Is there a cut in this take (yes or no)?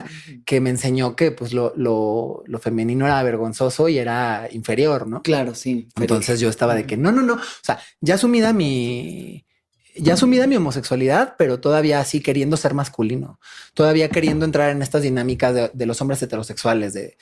no